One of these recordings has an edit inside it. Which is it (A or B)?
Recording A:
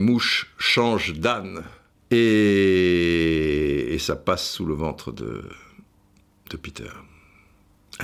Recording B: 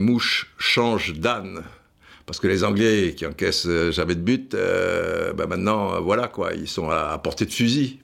A